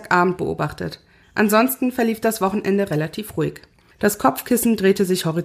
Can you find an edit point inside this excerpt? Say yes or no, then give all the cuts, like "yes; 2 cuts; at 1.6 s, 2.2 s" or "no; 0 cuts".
yes; 1 cut; at 3.9 s